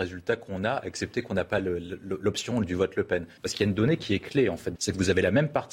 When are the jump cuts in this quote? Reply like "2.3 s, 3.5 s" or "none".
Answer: 3.4 s, 4.8 s